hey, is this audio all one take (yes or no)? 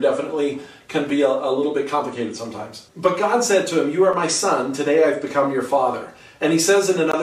no